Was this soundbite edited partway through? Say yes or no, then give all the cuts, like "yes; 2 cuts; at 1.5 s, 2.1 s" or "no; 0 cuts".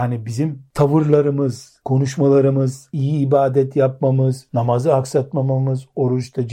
yes; 1 cut; at 2.9 s